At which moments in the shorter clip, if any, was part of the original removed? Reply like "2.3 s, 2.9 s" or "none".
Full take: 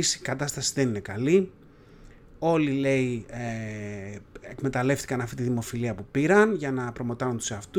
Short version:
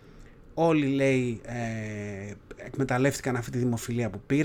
none